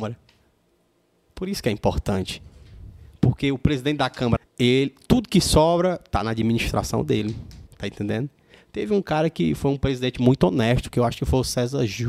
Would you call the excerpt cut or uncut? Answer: cut